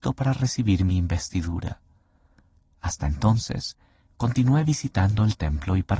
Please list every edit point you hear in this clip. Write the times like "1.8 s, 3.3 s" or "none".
none